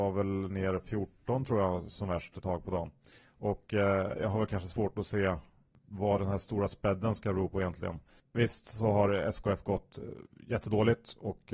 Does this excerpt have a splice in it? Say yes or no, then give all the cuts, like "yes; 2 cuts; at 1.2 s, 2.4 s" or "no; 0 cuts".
no; 0 cuts